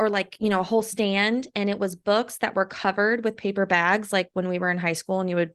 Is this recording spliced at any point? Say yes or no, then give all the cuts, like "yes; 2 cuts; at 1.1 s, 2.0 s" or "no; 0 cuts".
no; 0 cuts